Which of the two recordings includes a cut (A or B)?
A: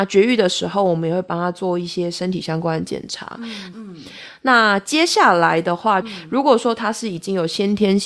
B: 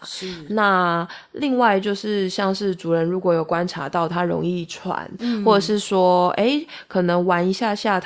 A